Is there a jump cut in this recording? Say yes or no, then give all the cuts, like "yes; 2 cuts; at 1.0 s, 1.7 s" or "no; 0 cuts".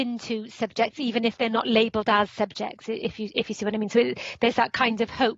no; 0 cuts